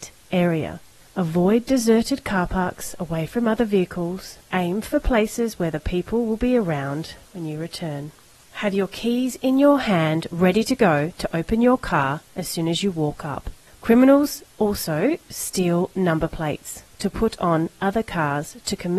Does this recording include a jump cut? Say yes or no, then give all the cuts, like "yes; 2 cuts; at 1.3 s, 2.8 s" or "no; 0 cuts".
no; 0 cuts